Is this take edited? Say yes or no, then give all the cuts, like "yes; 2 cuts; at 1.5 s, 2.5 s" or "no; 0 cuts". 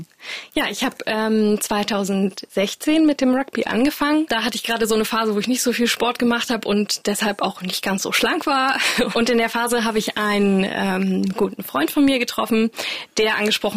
yes; 1 cut; at 9.1 s